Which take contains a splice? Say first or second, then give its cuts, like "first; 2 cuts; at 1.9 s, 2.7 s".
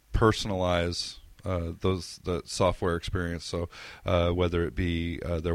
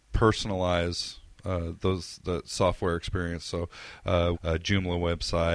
second; 1 cut; at 4.3 s